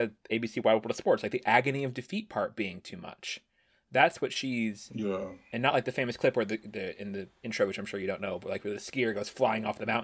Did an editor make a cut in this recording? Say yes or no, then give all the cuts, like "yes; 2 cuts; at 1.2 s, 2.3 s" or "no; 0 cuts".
no; 0 cuts